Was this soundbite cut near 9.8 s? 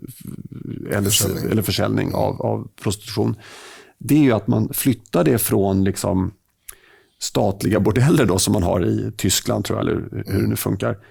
yes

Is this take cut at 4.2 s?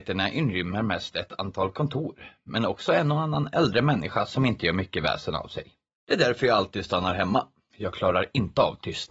no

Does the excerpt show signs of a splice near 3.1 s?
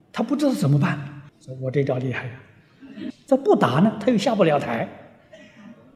yes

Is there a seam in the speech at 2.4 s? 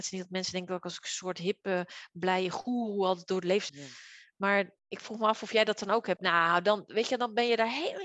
no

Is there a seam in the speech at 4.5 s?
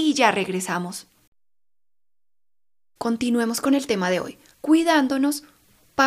yes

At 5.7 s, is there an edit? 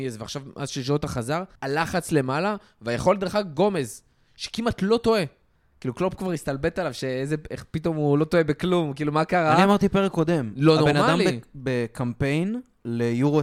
no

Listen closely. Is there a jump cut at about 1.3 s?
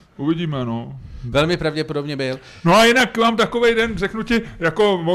yes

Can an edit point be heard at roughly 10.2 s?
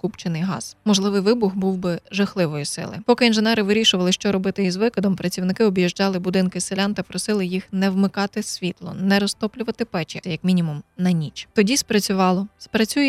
yes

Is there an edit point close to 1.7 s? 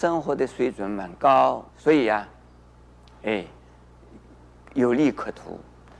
yes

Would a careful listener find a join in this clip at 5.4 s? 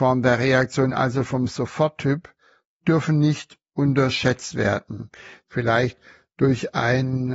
yes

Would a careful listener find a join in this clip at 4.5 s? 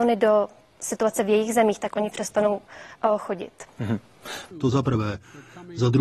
yes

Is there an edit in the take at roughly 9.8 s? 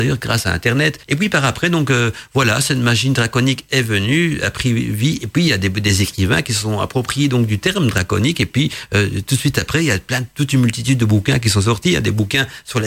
no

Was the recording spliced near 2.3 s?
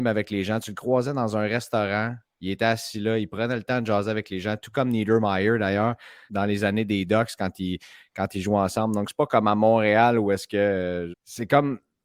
no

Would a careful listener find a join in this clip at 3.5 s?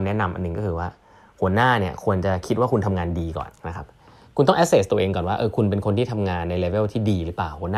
yes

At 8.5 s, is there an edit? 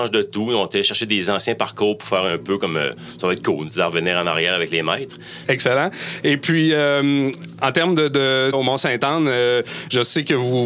yes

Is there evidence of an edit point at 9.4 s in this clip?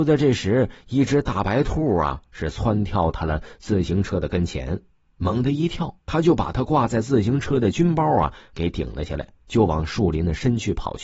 yes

